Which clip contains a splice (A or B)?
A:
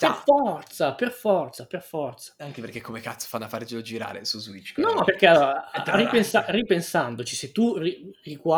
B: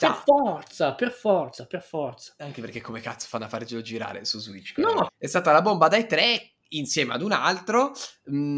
B